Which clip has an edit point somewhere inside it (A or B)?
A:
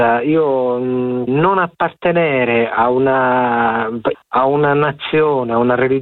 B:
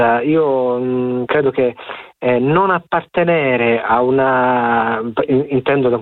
A